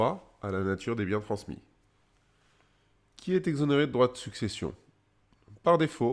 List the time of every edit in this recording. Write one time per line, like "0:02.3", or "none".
none